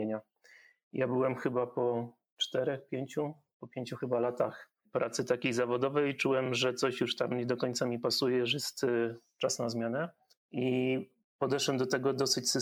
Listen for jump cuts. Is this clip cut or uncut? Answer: uncut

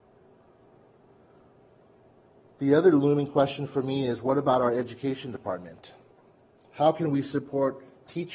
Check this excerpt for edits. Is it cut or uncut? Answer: uncut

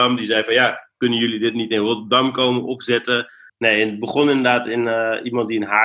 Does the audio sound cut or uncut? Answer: cut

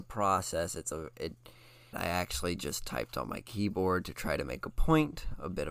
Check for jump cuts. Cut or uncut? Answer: cut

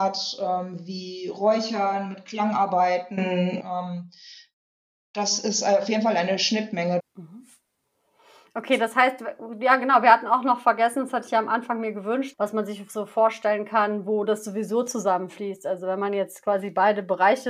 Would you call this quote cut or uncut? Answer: cut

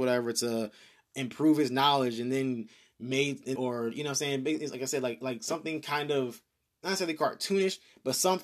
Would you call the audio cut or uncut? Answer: cut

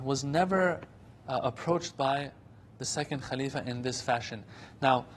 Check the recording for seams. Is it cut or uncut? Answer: uncut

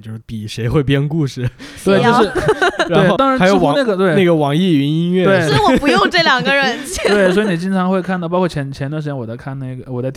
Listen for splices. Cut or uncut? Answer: cut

